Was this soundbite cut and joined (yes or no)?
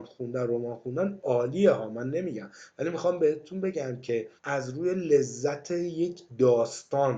yes